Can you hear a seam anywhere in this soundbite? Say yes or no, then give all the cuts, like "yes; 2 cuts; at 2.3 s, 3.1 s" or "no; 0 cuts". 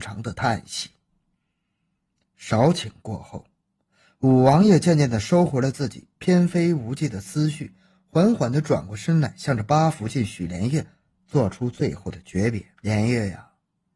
yes; 1 cut; at 12.7 s